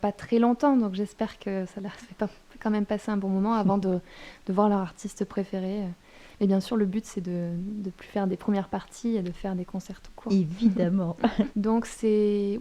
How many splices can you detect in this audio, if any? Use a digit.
1